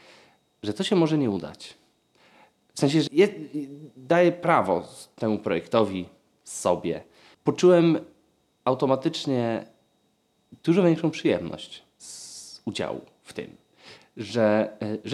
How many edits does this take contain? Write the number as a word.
three